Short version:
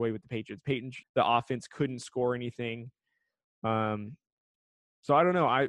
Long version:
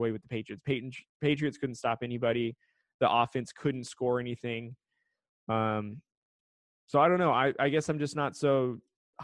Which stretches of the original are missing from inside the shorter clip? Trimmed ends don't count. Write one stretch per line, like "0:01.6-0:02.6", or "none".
0:01.0-0:02.9